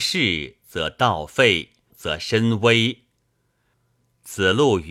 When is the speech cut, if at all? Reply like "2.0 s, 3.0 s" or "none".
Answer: 1.9 s, 3.7 s